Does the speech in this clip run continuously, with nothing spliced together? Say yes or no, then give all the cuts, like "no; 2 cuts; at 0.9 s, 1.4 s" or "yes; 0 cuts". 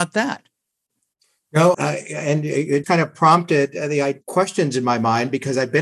no; 2 cuts; at 1.7 s, 2.8 s